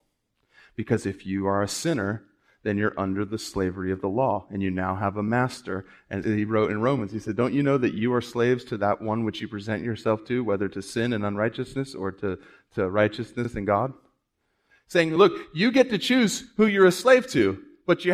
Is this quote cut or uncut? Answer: cut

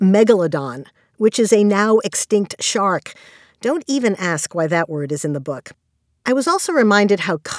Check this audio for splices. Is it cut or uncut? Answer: uncut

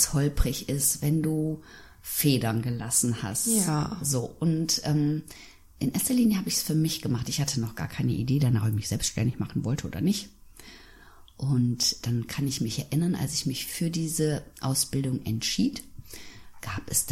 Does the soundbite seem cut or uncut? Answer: uncut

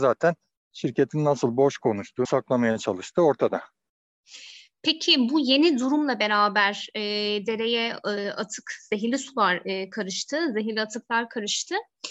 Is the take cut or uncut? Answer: cut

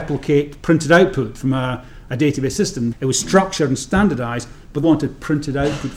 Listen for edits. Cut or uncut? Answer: cut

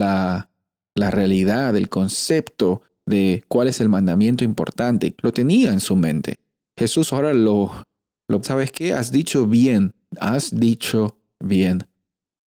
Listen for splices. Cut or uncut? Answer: cut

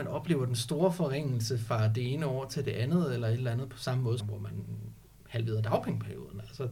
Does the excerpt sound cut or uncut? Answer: cut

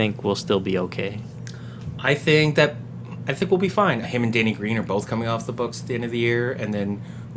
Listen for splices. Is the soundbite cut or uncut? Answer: cut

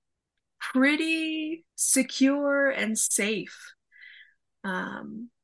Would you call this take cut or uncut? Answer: cut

